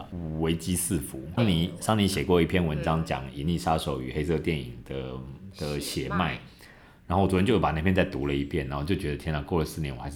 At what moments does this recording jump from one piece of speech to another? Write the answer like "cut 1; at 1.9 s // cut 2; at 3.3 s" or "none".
cut 1; at 1.4 s